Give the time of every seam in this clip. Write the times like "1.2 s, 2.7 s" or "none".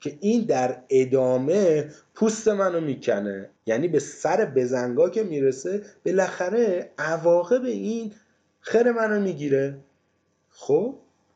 3.6 s